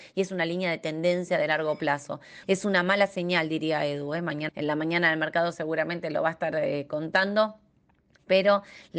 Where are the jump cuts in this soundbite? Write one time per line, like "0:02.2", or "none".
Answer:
0:02.4
0:04.5